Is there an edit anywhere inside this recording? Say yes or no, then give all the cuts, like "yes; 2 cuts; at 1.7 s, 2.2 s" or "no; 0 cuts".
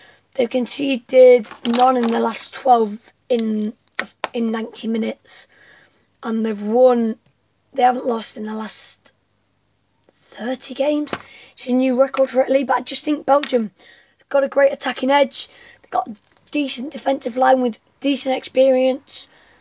no; 0 cuts